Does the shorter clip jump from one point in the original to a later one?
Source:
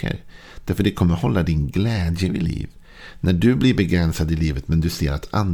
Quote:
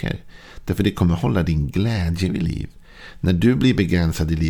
no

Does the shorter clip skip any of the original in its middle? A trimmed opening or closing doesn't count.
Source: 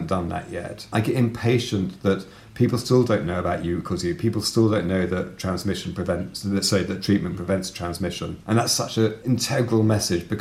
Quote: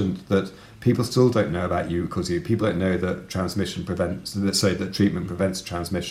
yes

